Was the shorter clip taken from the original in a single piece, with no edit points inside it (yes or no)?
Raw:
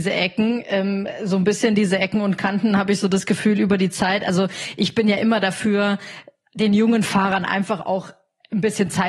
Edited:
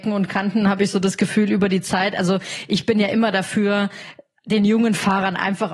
yes